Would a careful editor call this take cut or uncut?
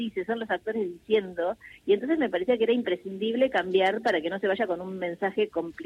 uncut